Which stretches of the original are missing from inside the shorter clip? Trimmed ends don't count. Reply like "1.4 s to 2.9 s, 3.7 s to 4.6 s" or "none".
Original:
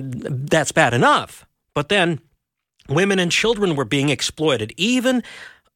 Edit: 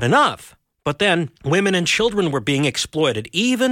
2.3 s to 2.8 s